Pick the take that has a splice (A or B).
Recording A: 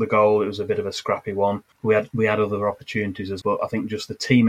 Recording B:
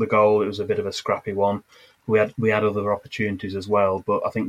A